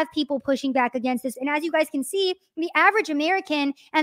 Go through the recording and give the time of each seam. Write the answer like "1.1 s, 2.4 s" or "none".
1.3 s